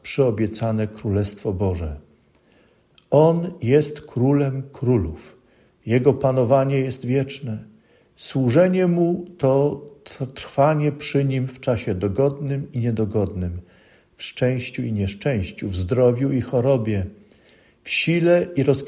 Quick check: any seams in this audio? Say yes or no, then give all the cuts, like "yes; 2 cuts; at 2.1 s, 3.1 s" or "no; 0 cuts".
no; 0 cuts